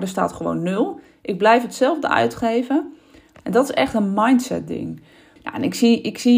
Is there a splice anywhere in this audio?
yes; 2 cuts; at 3.3 s, 5.4 s

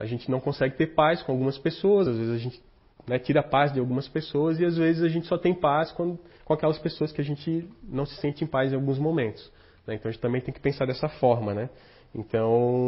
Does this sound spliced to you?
no; 0 cuts

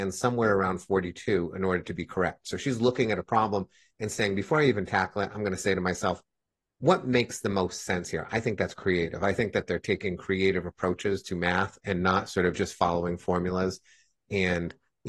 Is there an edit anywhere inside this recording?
no; 0 cuts

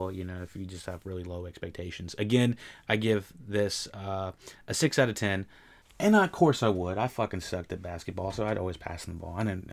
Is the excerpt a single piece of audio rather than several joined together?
no; 1 cut; at 5.8 s

